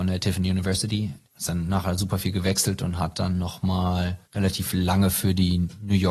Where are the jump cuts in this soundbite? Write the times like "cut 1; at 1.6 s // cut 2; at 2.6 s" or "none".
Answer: cut 1; at 1.2 s // cut 2; at 4.2 s